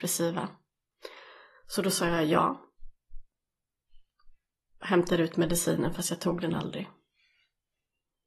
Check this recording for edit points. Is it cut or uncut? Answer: uncut